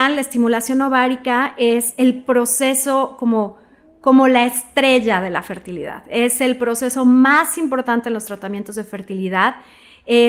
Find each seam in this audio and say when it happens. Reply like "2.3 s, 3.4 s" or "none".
none